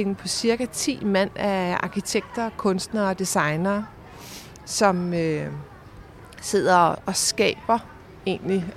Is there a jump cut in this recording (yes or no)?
no